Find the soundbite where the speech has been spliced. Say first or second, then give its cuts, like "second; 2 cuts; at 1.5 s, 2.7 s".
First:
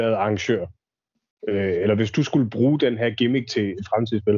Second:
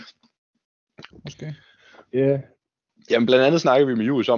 second; 1 cut; at 1.1 s